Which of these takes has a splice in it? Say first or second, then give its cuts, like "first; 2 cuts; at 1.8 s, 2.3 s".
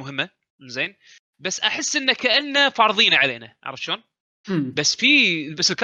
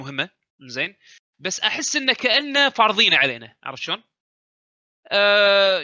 first; 1 cut; at 4.4 s